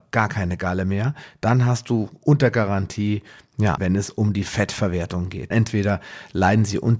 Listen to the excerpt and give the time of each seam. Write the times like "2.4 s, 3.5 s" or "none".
3.8 s, 5.5 s